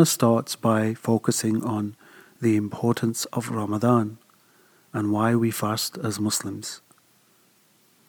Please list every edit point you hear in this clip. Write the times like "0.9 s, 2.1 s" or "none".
none